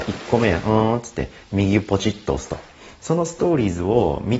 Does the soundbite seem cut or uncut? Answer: cut